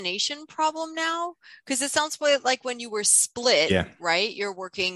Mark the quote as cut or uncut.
uncut